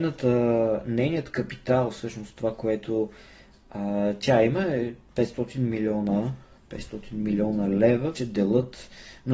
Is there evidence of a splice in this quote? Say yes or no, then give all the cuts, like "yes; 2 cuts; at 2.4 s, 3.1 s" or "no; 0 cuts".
yes; 1 cut; at 8.1 s